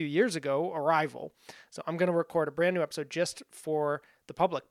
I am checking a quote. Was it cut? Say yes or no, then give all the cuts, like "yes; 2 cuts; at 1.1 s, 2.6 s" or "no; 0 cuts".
no; 0 cuts